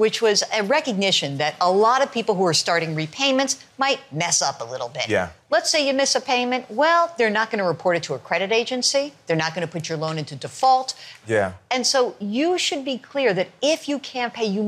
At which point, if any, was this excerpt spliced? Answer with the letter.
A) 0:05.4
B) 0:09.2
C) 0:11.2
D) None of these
C